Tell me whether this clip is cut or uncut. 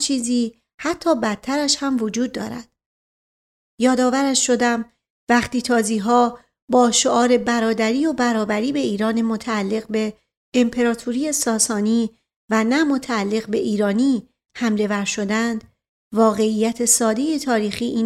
uncut